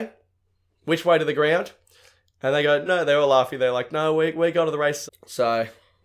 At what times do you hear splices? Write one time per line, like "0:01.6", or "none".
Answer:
0:02.9
0:05.1

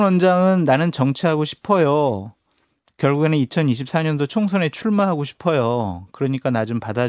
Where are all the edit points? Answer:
none

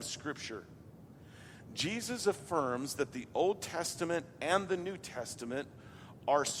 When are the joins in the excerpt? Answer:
none

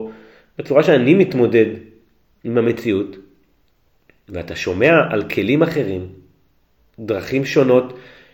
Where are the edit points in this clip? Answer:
none

